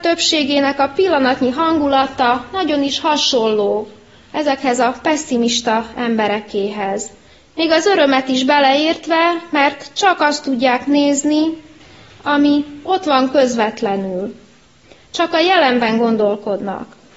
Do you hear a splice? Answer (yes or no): no